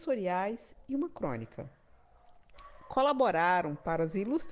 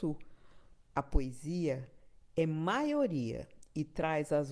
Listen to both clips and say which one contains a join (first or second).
second